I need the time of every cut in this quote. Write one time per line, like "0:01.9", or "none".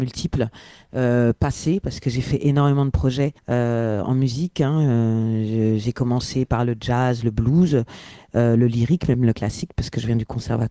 0:03.4